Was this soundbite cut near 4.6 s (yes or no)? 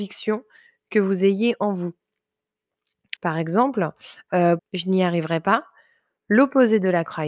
yes